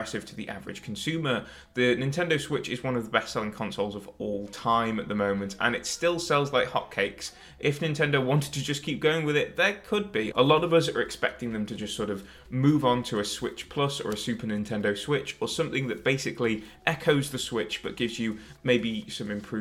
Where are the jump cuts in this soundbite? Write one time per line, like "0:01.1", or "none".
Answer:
0:10.3